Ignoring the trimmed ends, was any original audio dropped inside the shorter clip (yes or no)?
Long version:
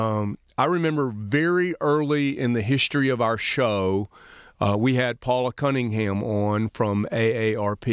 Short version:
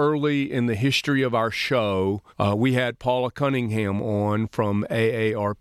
yes